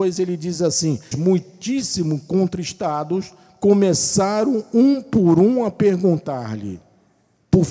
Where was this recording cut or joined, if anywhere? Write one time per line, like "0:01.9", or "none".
0:01.1